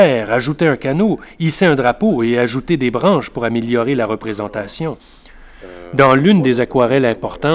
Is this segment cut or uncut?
uncut